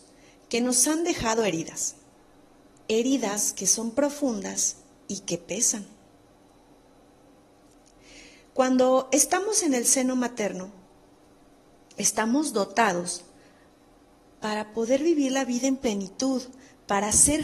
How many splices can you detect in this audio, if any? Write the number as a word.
zero